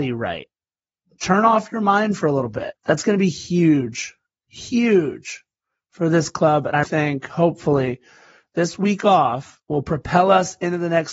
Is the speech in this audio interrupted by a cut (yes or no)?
yes